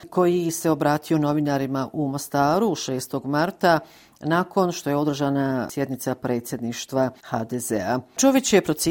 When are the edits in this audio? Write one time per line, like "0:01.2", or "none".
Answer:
none